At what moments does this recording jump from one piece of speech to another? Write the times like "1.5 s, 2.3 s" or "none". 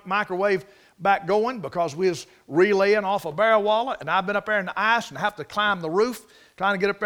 none